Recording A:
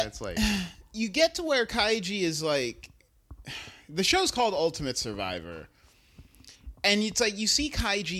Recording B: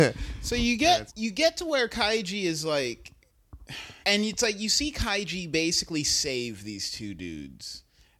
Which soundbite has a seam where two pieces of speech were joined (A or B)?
B